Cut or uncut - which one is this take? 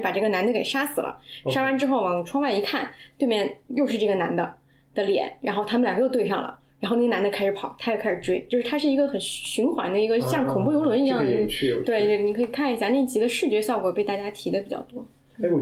uncut